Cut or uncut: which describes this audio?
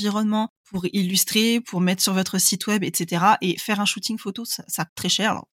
uncut